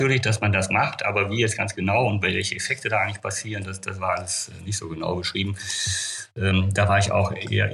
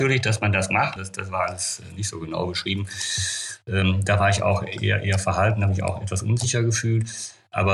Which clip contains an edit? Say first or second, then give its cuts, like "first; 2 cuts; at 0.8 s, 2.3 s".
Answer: second; 1 cut; at 1.0 s